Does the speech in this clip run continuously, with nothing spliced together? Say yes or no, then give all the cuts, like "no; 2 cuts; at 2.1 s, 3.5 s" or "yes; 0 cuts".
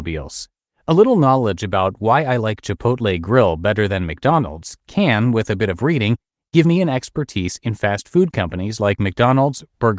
yes; 0 cuts